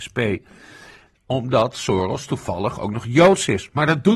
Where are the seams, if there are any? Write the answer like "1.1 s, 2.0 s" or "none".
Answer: 1.1 s